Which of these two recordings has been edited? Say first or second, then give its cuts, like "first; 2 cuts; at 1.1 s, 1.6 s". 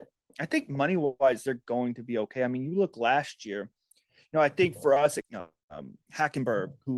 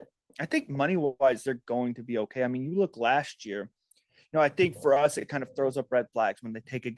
first; 1 cut; at 5.2 s